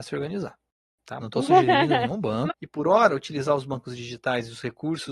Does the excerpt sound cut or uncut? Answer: cut